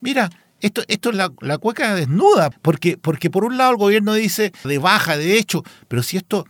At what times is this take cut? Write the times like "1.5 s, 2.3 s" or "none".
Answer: 2.5 s, 4.6 s